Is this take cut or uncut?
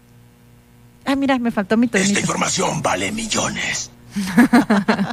uncut